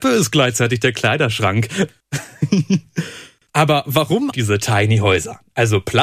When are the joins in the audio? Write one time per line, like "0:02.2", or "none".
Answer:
0:01.9
0:04.3